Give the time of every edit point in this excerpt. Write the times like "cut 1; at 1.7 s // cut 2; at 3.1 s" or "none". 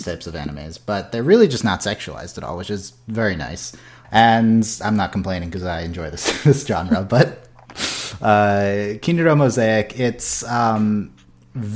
cut 1; at 4.0 s